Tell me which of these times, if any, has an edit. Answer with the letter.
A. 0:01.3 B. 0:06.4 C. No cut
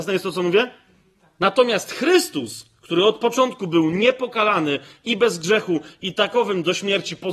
C